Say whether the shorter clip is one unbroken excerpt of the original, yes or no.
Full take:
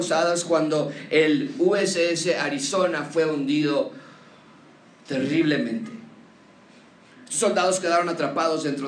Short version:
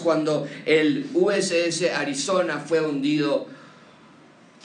yes